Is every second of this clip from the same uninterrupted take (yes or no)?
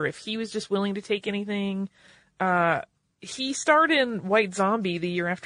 yes